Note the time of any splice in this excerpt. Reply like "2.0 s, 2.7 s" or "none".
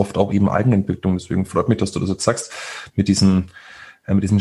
none